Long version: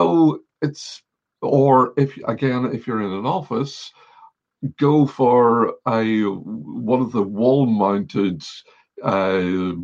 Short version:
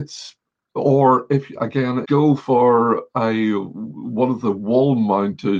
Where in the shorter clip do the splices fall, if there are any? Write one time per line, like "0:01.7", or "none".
0:02.0